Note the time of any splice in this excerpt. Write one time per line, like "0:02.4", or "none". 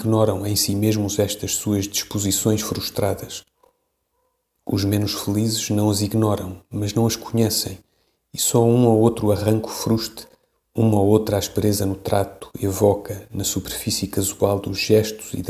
none